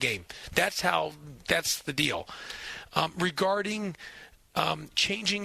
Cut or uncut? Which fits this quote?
uncut